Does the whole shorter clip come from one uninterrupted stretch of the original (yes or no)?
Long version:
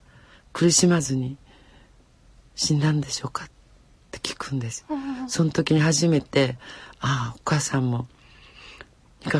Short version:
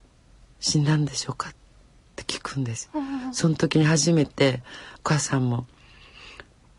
no